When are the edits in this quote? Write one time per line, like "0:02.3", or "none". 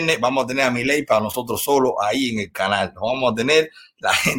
none